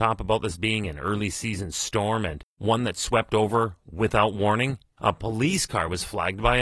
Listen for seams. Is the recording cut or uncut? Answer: cut